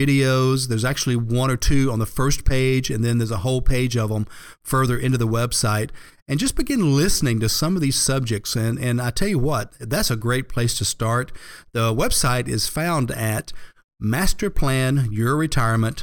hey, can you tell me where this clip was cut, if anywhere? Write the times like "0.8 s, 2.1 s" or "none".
none